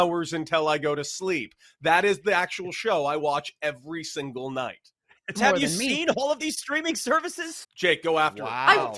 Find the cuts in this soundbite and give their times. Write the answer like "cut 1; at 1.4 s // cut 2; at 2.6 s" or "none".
cut 1; at 5.4 s // cut 2; at 7.6 s